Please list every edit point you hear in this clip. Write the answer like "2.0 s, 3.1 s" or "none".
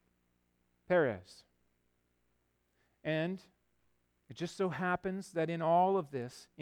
none